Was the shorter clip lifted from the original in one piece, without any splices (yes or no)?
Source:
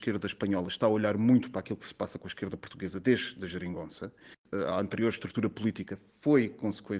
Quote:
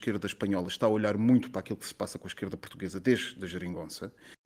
yes